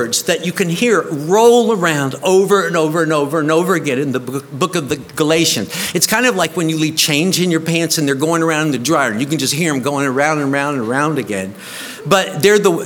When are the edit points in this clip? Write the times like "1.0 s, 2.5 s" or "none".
none